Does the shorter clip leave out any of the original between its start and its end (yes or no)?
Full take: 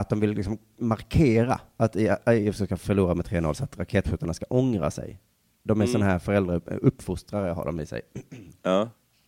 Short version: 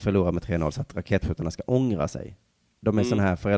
no